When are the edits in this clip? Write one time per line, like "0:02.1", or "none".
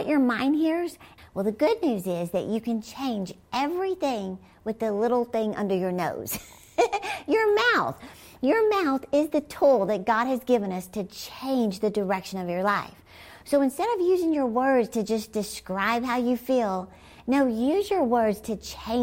0:01.2